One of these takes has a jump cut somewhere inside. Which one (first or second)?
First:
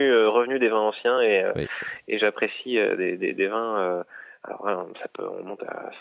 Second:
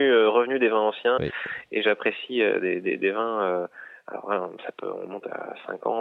second